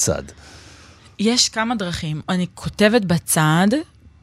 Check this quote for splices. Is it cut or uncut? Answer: uncut